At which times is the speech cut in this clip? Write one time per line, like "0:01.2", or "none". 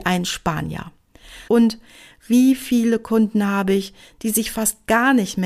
0:01.5